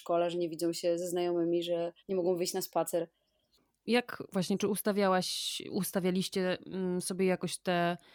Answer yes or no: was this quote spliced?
yes